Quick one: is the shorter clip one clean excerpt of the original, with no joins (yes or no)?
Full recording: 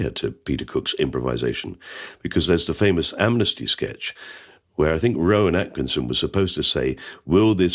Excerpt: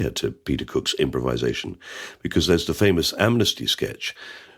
yes